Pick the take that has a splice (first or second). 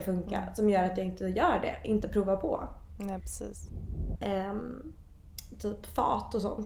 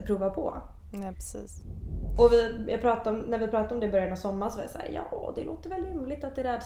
first